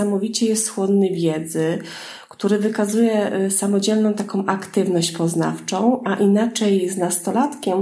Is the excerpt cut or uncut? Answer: uncut